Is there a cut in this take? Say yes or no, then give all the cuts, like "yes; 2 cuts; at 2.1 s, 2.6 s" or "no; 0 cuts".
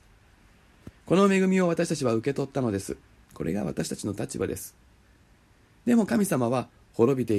yes; 1 cut; at 3.2 s